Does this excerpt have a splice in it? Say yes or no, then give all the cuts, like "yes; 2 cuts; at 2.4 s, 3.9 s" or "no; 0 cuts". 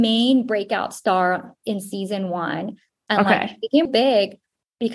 yes; 1 cut; at 3.9 s